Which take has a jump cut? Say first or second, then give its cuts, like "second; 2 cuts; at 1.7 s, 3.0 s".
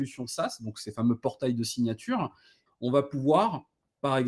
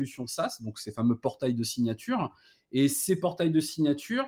first; 1 cut; at 2.7 s